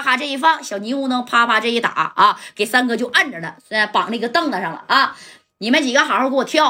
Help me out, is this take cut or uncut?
uncut